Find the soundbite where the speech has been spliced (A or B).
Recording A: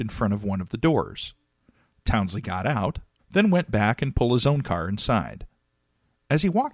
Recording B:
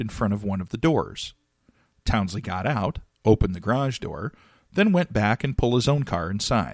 A